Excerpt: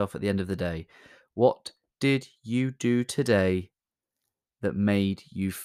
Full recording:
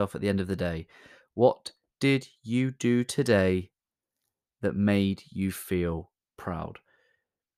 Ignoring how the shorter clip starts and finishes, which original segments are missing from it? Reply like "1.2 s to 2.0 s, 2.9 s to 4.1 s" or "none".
none